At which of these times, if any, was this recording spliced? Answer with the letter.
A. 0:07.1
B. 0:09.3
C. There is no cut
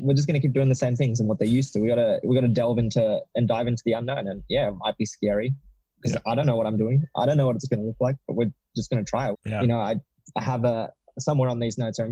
B